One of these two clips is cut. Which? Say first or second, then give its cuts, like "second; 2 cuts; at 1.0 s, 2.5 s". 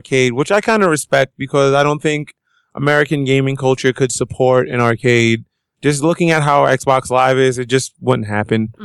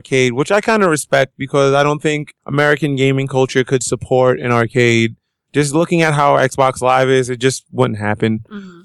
second; 1 cut; at 2.4 s